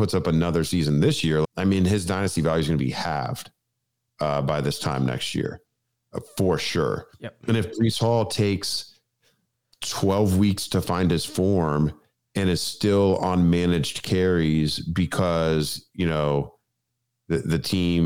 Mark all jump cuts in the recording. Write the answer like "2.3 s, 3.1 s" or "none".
1.4 s